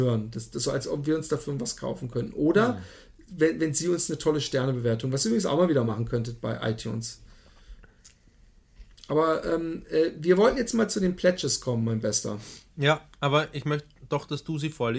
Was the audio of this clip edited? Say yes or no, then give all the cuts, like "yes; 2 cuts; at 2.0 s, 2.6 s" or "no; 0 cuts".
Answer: no; 0 cuts